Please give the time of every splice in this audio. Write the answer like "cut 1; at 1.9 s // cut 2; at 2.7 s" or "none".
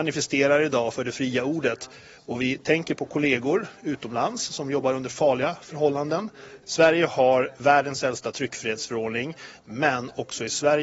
cut 1; at 6.6 s // cut 2; at 9.6 s

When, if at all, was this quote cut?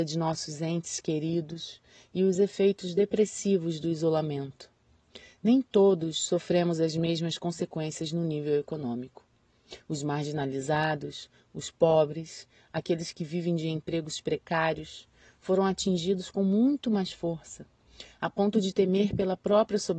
none

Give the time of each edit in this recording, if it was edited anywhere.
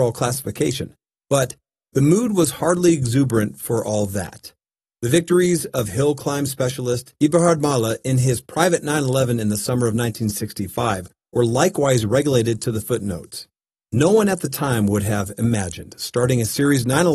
cut 1; at 4.9 s

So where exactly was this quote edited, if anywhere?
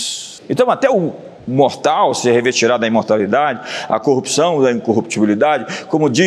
none

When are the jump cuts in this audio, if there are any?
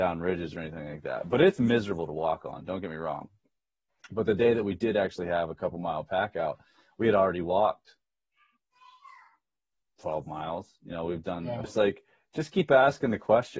cut 1; at 11.6 s

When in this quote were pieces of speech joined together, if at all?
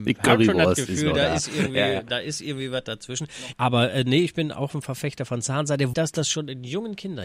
cut 1; at 3.5 s // cut 2; at 5.9 s

